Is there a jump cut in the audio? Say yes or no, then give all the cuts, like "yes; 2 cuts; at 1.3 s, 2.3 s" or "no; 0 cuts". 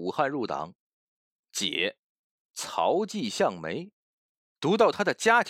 no; 0 cuts